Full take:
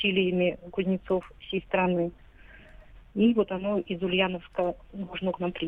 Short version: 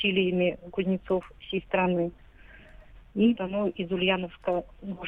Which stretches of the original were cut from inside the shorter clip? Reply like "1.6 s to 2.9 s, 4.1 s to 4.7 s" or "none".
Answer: 3.3 s to 3.5 s